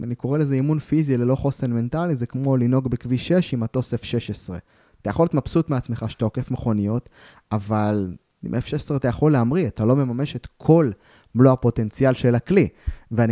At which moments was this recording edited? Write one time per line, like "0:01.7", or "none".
none